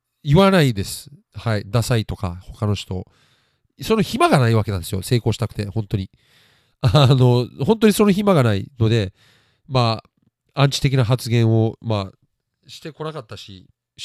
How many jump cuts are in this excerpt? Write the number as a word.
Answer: one